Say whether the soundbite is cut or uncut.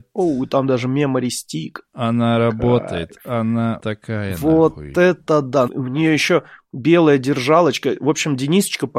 cut